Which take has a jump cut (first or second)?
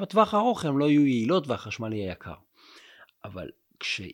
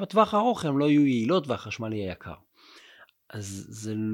second